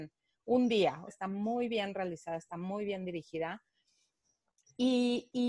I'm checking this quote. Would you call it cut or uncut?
cut